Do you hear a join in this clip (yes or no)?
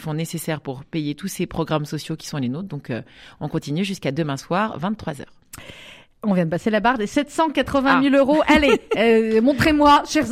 no